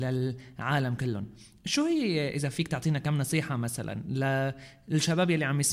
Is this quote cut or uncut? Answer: uncut